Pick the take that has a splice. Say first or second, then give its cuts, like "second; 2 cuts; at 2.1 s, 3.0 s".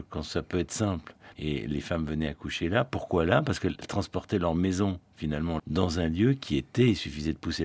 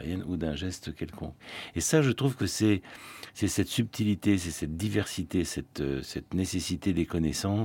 first; 2 cuts; at 1.3 s, 5.6 s